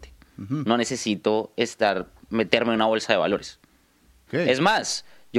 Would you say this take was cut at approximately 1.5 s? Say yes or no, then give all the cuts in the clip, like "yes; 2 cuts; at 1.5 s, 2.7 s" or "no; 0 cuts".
no; 1 cut; at 4.3 s